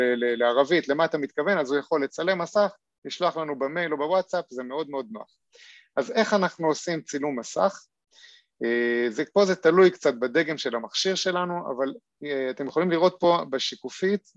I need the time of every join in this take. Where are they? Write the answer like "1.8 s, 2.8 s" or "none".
none